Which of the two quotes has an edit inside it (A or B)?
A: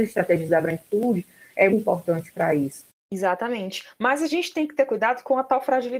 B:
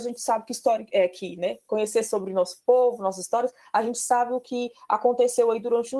A